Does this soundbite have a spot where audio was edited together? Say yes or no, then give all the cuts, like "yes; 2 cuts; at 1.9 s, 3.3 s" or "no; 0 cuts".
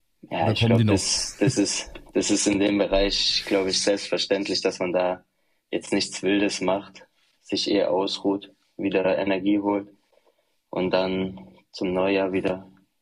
no; 0 cuts